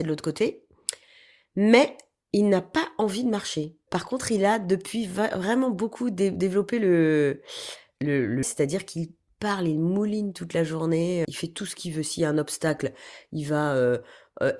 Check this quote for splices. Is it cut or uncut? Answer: cut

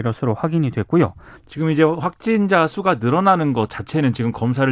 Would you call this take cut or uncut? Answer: cut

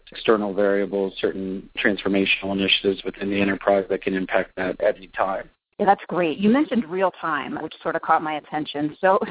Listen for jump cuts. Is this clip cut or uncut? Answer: cut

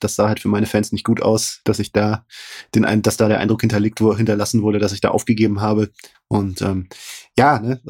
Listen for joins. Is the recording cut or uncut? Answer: cut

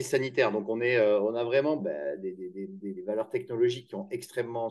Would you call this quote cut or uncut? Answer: cut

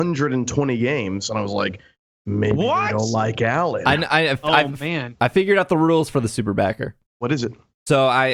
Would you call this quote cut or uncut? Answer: uncut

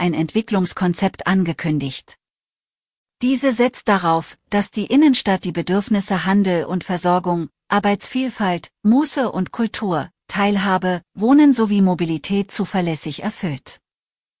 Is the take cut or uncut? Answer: uncut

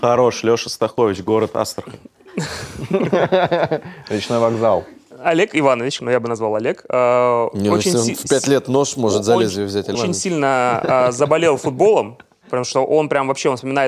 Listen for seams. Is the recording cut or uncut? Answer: cut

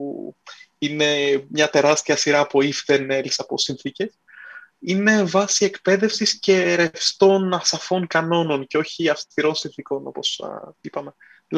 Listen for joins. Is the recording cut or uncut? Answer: uncut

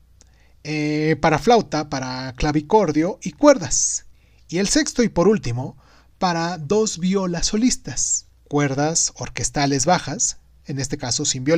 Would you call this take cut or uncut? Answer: uncut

